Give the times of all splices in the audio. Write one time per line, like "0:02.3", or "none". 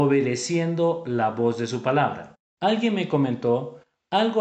0:02.6